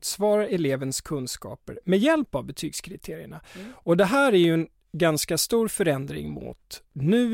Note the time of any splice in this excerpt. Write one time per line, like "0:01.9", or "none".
none

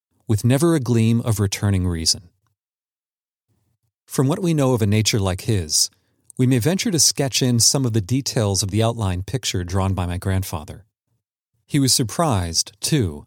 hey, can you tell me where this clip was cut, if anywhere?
0:11.6

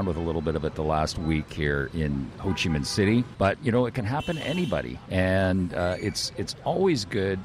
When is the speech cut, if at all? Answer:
0:03.3
0:05.1

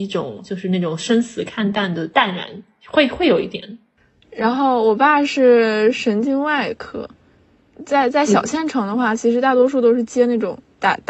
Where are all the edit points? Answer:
0:04.2

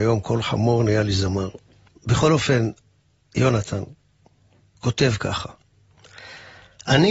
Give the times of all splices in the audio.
0:01.9

